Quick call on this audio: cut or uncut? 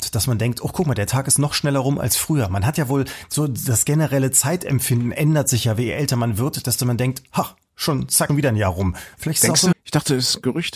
cut